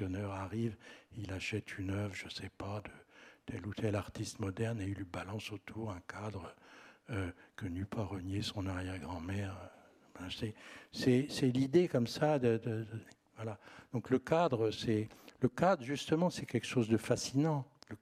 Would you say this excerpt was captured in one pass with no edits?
yes; 0 cuts

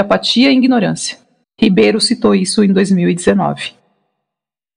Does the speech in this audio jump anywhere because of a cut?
yes; 1 cut; at 1.4 s

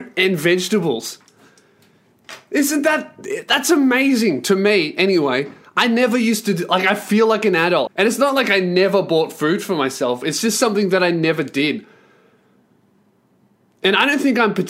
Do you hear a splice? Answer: yes; 1 cut; at 7.9 s

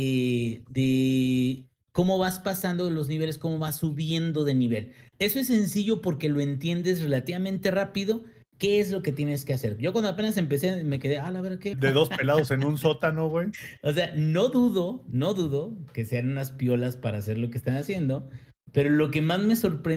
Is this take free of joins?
no; 1 cut; at 11.7 s

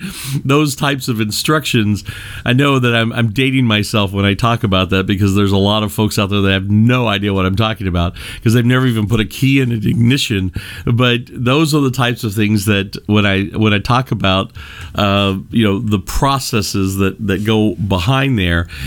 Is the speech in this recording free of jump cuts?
no; 1 cut; at 10.8 s

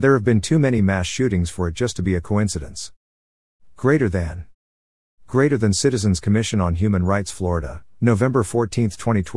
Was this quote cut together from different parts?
no; 0 cuts

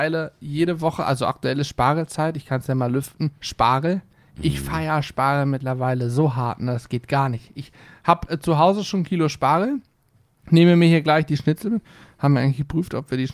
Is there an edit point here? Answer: no; 0 cuts

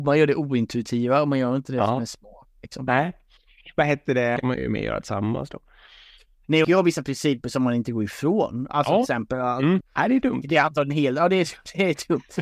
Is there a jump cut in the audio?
yes; 3 cuts; at 4.4 s, 6.6 s, 9.8 s

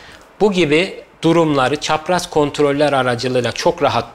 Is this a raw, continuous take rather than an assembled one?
yes; 0 cuts

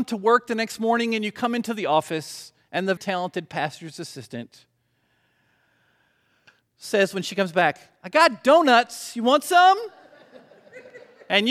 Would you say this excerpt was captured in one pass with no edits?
no; 1 cut; at 3.0 s

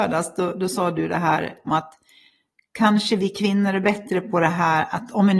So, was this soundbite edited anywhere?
yes; 1 cut; at 1.7 s

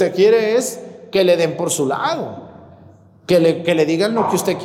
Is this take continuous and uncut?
yes; 0 cuts

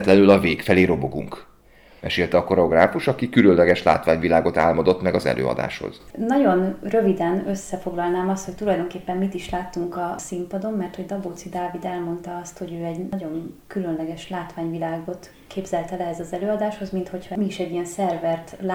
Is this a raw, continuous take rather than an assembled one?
no; 1 cut; at 2.0 s

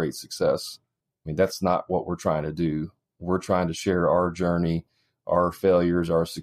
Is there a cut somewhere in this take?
no; 0 cuts

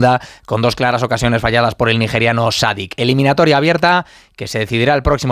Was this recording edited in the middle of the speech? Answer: no; 0 cuts

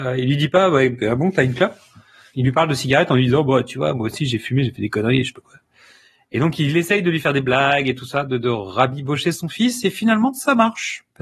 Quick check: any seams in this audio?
no; 0 cuts

